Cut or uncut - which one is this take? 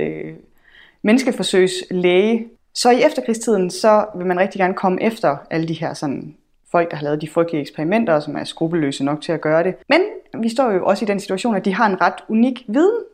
cut